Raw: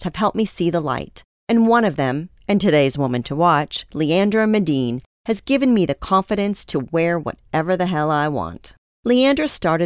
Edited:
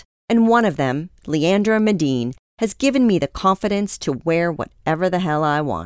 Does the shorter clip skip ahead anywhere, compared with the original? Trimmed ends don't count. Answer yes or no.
yes